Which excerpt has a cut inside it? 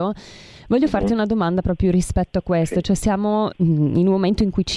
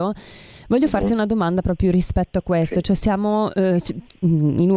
first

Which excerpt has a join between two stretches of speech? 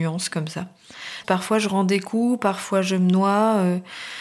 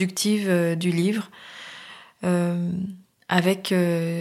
first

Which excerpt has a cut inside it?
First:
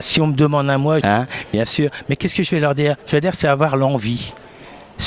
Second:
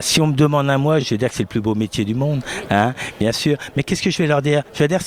first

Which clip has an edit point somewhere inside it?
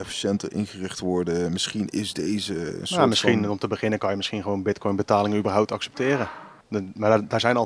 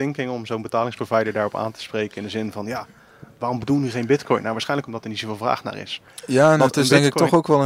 first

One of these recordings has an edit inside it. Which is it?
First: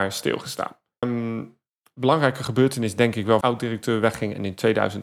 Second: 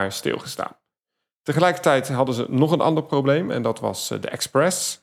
first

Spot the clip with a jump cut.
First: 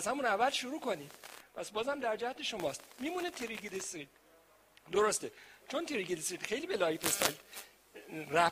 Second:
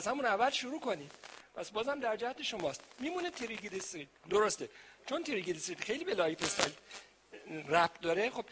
second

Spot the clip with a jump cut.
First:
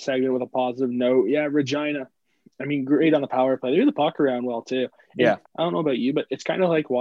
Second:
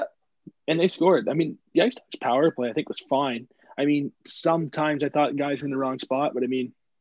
first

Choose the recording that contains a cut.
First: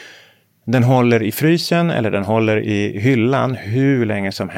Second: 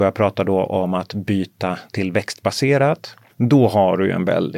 second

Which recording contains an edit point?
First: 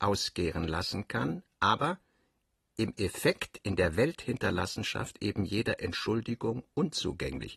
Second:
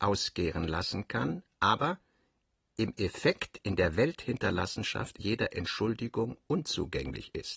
second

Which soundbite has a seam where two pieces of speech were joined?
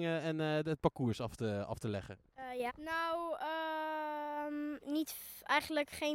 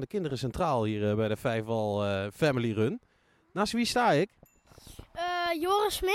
first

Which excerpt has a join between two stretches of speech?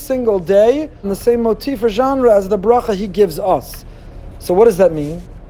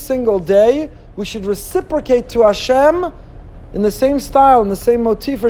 first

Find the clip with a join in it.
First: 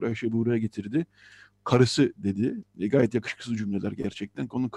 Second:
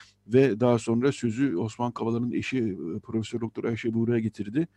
first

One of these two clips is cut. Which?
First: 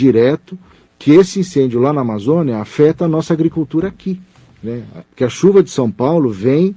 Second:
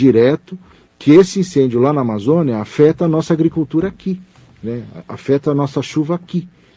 first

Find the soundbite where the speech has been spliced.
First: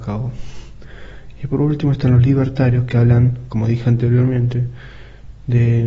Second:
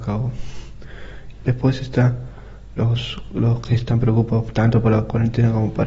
second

